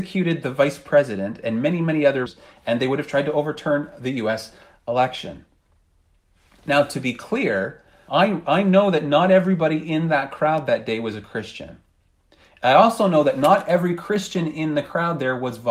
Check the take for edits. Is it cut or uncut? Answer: uncut